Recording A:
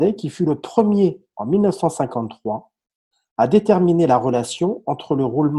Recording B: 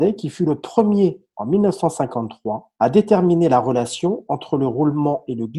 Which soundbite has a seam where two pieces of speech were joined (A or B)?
B